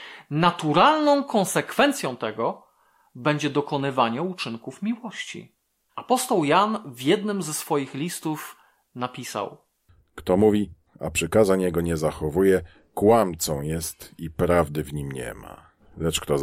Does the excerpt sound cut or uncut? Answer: cut